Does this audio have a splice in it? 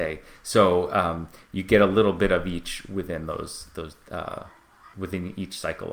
yes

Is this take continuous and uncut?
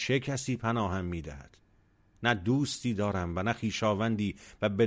yes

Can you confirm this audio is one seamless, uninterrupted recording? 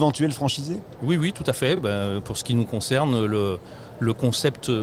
yes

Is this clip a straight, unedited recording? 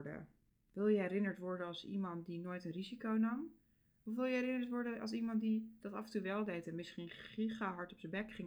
yes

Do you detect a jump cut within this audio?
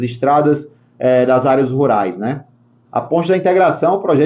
yes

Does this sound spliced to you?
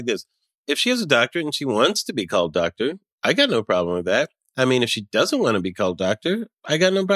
no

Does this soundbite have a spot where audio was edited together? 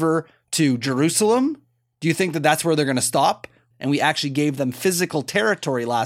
yes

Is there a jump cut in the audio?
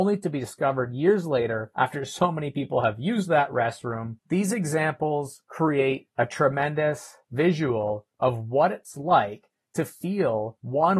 yes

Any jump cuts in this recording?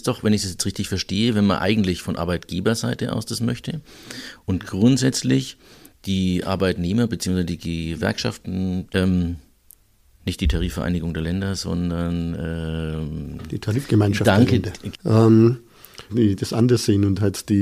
yes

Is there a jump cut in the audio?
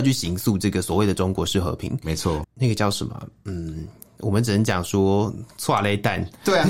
yes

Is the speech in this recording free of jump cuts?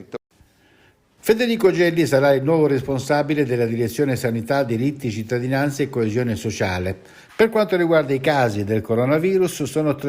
no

